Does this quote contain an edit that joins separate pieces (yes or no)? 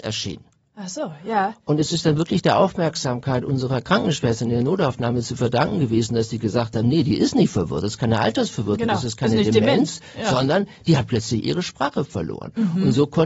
no